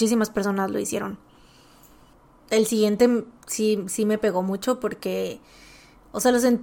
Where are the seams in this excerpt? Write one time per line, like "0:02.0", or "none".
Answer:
none